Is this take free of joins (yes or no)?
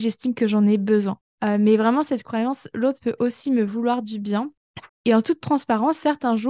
no